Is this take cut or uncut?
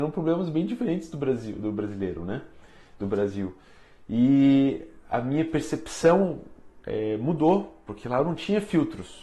uncut